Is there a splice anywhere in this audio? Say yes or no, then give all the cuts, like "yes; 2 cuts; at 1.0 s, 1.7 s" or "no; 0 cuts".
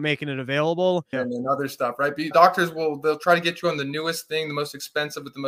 yes; 2 cuts; at 1.1 s, 2.3 s